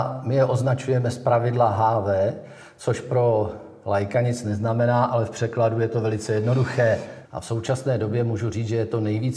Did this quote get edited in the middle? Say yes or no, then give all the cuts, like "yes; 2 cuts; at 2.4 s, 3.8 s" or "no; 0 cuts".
yes; 1 cut; at 7.2 s